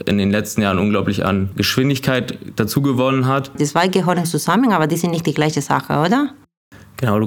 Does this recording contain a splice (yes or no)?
yes